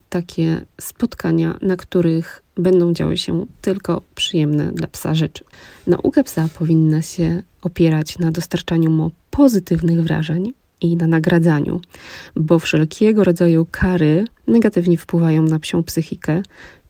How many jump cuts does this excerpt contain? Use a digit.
0